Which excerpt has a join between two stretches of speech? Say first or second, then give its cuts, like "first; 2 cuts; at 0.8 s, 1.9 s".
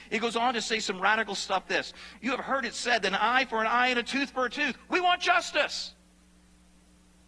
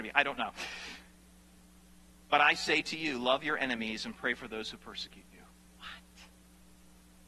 first; 1 cut; at 1.6 s